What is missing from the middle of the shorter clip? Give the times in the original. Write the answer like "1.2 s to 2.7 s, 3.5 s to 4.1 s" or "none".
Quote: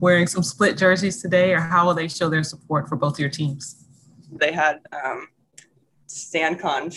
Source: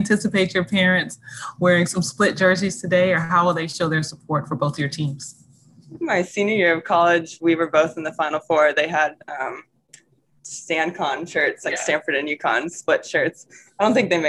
6.0 s to 8.7 s